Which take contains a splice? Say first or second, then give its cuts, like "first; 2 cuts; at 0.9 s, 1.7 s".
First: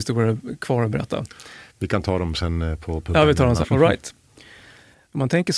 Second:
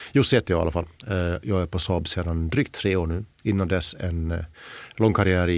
first; 2 cuts; at 1.7 s, 3.6 s